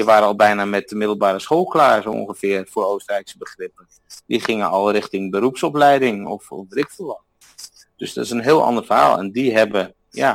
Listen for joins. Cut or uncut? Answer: uncut